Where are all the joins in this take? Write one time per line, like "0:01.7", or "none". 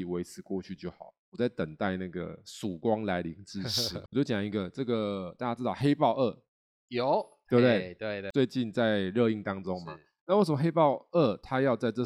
none